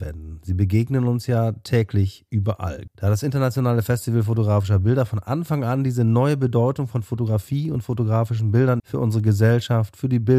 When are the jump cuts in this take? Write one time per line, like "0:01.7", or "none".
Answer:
0:02.9
0:08.8